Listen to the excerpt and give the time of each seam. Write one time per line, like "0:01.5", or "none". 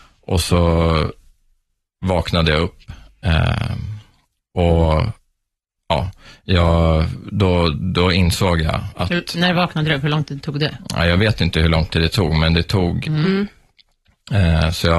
0:13.0